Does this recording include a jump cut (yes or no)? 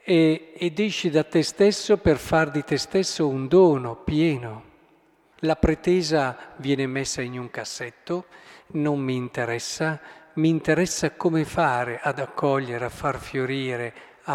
yes